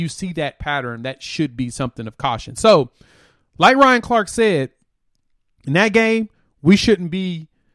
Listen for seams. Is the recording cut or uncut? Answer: uncut